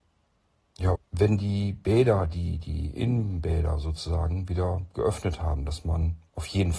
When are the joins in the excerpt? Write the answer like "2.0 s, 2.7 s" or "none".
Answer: 0.9 s